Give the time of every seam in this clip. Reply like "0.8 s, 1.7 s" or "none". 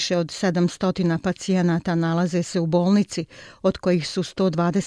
none